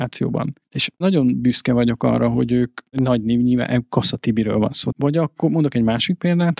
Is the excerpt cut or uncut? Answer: cut